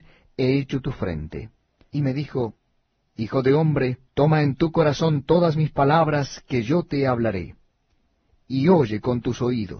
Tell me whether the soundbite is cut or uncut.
cut